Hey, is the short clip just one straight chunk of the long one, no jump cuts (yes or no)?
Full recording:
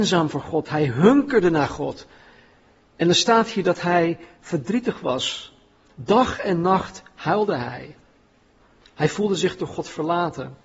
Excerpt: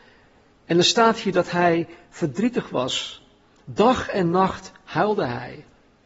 yes